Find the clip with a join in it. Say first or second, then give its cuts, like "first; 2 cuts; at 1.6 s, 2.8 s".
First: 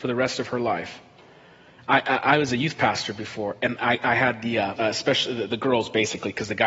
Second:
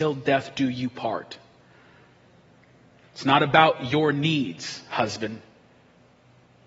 first; 2 cuts; at 1.8 s, 4.8 s